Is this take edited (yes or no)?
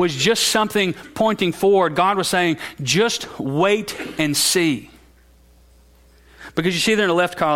no